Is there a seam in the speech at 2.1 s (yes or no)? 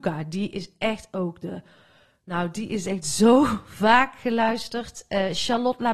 no